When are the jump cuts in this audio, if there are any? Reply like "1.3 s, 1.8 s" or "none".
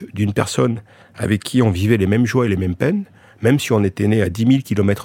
none